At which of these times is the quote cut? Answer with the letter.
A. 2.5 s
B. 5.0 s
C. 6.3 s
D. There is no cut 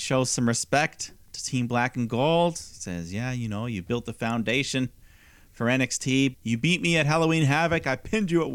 C